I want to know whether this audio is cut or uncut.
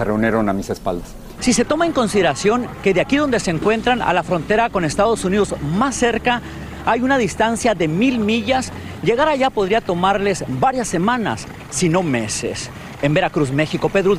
cut